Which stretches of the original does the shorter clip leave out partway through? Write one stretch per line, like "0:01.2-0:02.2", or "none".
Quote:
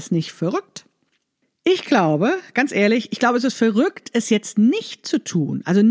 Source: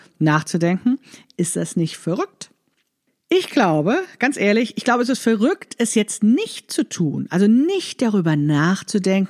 none